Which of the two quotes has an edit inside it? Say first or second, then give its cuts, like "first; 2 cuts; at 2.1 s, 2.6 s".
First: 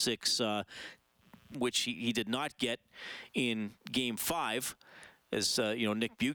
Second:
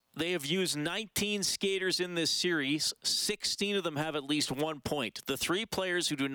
first; 1 cut; at 1.5 s